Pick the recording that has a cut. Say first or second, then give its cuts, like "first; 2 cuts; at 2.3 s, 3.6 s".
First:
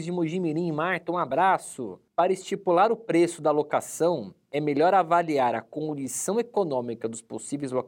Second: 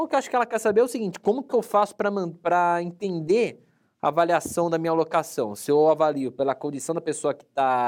first; 1 cut; at 2.1 s